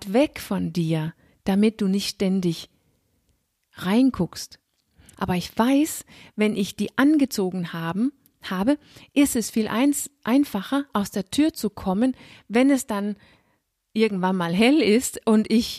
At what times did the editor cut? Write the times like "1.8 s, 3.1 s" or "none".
5.1 s

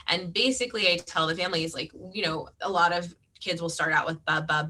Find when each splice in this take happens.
2.5 s

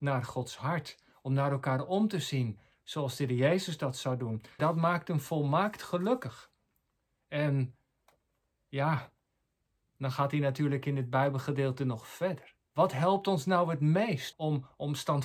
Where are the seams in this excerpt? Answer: 4.6 s, 12.7 s, 14.3 s

